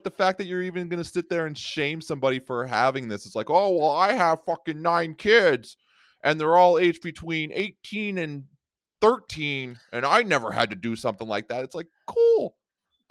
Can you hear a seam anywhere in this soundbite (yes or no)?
no